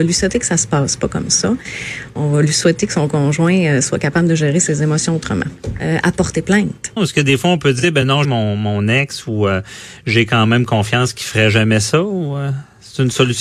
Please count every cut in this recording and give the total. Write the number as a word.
three